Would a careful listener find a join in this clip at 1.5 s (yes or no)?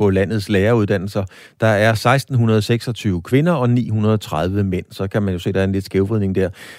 no